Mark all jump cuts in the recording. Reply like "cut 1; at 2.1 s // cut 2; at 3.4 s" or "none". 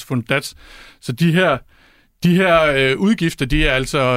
none